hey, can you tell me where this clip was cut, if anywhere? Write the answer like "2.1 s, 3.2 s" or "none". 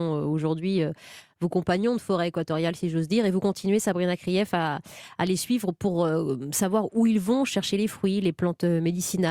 none